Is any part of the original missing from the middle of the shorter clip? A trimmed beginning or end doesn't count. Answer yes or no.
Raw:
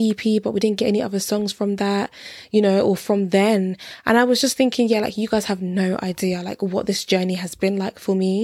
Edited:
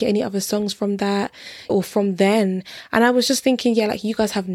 yes